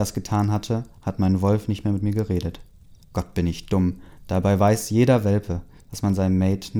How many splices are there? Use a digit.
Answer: 1